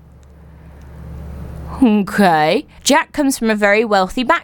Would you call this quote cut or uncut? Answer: cut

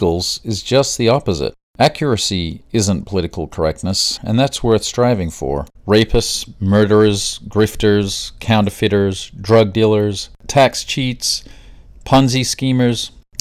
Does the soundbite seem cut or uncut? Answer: cut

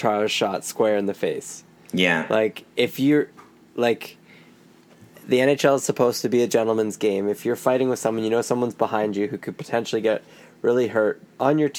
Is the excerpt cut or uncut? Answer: uncut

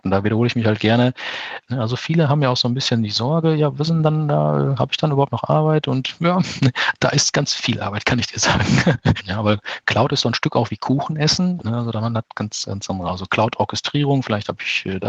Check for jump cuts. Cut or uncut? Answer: cut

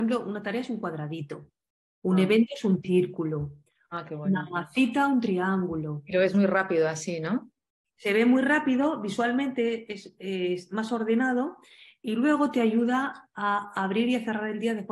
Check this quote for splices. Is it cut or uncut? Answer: uncut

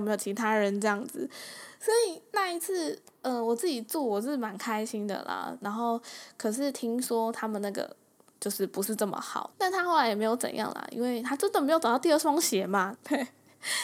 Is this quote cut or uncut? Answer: cut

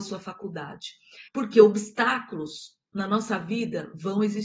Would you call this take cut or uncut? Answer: cut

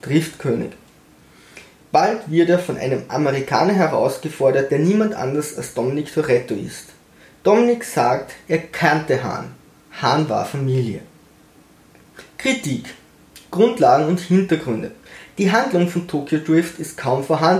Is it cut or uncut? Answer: uncut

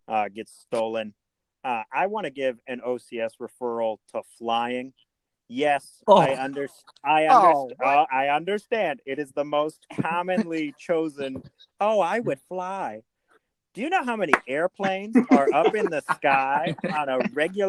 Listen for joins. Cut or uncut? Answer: uncut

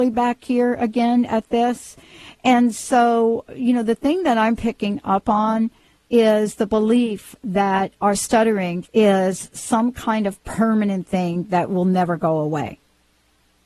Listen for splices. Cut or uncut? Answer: cut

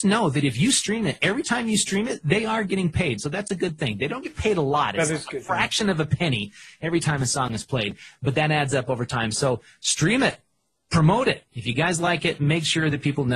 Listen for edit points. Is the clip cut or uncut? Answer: uncut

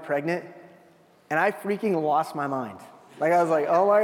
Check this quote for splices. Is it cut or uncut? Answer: uncut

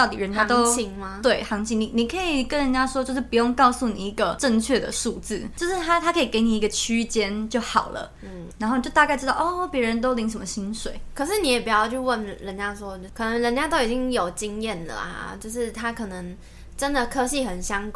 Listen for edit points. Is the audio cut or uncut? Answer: uncut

